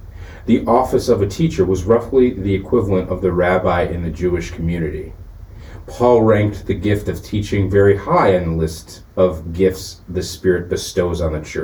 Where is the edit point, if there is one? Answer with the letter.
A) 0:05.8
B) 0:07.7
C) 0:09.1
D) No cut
C